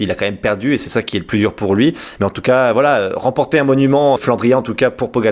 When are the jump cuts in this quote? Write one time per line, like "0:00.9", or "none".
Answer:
0:02.2
0:04.2

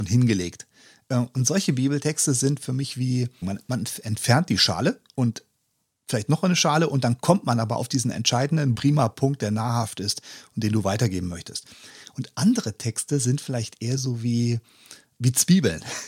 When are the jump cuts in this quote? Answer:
0:03.4
0:08.7
0:15.1

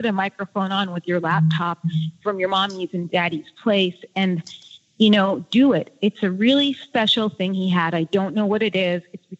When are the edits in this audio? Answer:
none

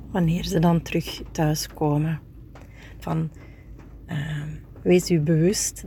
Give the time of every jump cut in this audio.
0:03.0

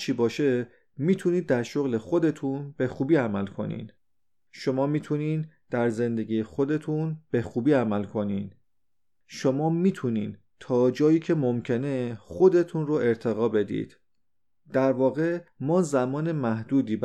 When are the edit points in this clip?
none

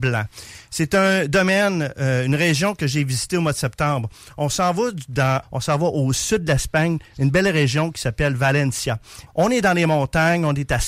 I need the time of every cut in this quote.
0:05.4
0:09.3

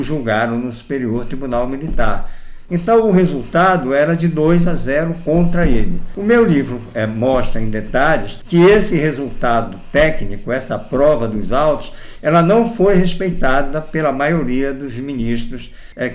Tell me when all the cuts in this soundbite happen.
0:02.7

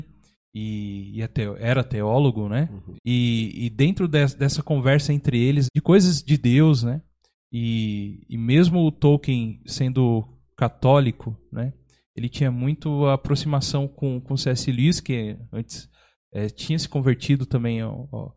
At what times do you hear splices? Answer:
0:03.0
0:05.6

